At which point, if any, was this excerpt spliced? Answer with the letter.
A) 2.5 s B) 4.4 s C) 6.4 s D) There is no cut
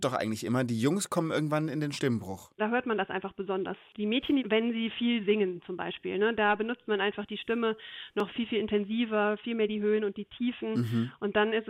B